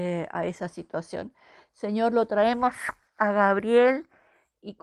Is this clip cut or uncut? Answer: uncut